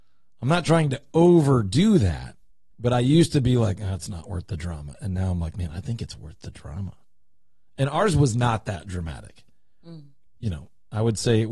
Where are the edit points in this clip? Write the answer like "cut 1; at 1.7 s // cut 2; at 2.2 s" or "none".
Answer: cut 1; at 10.4 s